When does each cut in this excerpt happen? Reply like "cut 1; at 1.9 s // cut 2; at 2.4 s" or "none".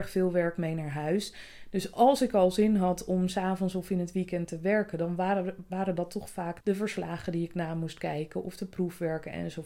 cut 1; at 6.6 s